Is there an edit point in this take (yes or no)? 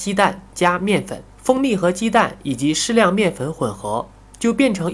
yes